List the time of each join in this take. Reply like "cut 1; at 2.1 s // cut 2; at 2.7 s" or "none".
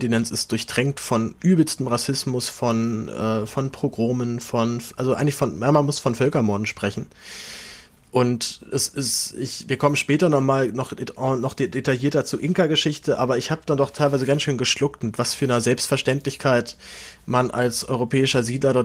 none

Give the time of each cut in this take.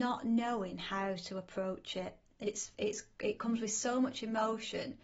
none

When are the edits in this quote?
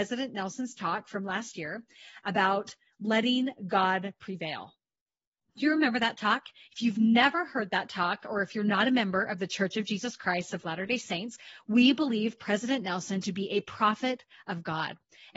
none

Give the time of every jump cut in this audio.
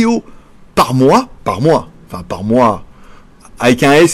cut 1; at 1.4 s

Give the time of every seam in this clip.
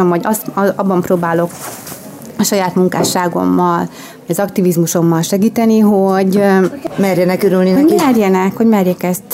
none

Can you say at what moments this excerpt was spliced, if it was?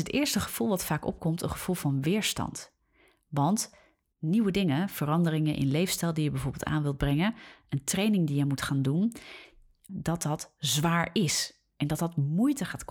cut 1; at 9.9 s

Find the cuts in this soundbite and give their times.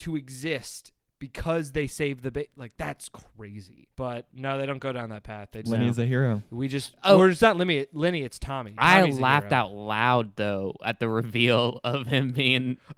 cut 1; at 3.9 s // cut 2; at 5.7 s

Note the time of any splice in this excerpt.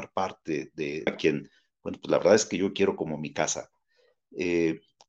cut 1; at 1.1 s

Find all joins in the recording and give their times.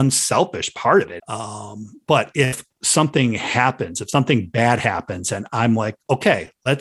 cut 1; at 1.2 s

